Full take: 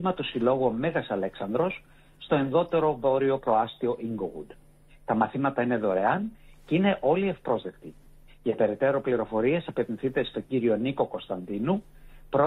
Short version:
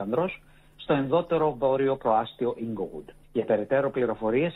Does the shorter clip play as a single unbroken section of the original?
no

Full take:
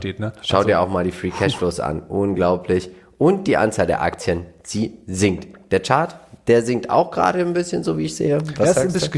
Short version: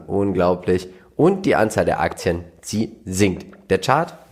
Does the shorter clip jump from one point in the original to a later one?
no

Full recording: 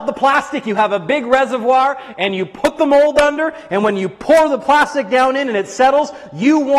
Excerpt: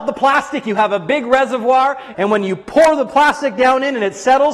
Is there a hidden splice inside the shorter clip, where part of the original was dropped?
yes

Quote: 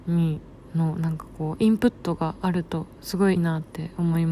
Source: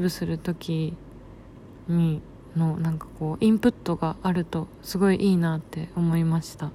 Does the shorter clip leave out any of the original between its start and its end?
yes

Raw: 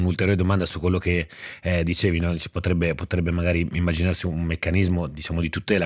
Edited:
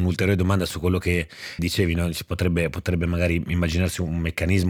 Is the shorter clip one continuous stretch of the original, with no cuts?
no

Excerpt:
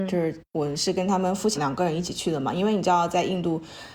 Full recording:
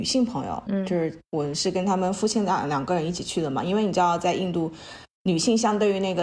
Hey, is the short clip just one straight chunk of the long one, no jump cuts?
no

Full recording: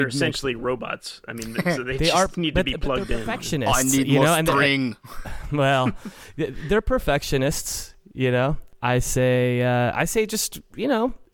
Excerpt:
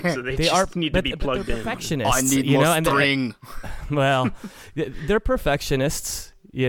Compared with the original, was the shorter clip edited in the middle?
no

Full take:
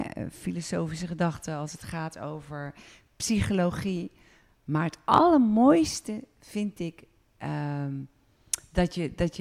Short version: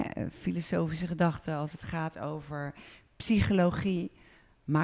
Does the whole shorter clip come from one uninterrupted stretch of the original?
yes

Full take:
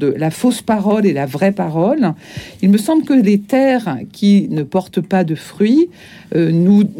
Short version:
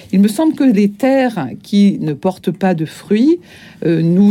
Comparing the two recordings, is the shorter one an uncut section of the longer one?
yes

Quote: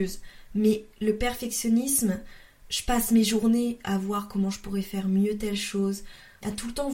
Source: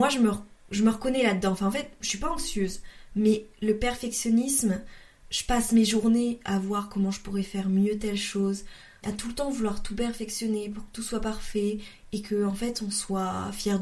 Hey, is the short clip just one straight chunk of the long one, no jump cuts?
yes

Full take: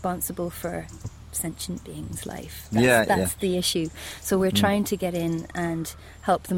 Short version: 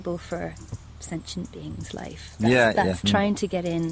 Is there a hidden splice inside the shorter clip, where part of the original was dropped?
yes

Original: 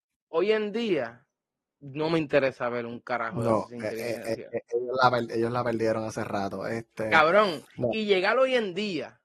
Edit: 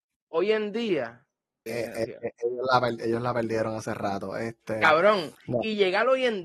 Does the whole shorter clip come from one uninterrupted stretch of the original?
no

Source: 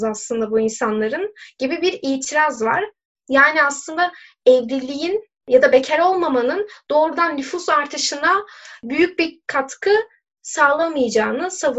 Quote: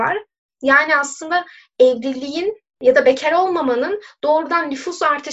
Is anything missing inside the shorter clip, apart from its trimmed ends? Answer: no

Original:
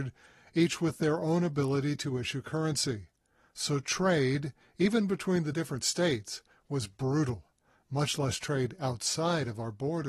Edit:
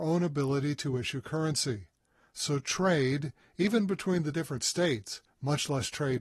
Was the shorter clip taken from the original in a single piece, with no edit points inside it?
no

